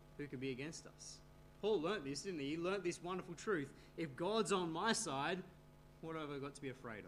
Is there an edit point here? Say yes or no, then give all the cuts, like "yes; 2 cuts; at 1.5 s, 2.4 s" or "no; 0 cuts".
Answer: no; 0 cuts